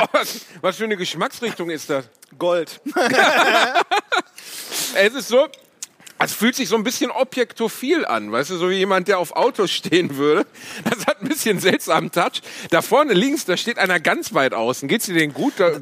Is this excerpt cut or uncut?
uncut